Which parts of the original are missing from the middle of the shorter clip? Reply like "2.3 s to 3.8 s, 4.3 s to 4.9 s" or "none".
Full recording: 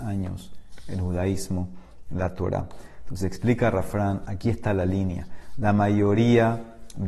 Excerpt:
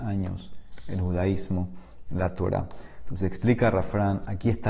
none